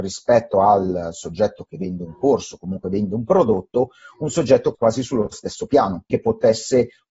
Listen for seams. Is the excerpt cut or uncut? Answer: cut